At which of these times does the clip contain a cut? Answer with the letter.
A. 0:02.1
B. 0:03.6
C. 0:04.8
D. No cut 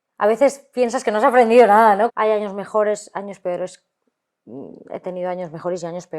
A